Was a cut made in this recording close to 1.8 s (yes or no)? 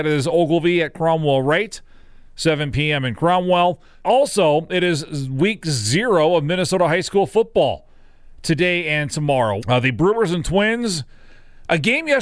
no